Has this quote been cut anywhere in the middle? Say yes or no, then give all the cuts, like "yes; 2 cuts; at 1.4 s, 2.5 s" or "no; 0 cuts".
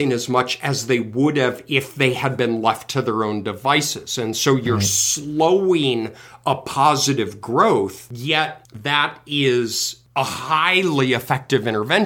no; 0 cuts